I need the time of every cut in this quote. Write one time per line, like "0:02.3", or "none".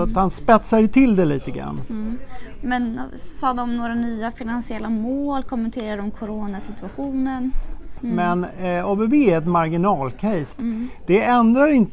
0:08.0
0:10.5